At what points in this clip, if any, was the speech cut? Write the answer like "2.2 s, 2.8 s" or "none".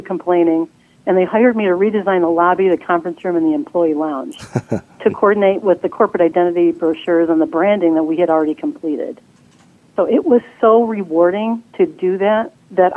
none